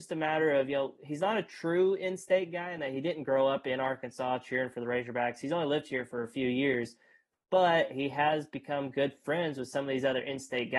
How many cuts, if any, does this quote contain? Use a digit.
0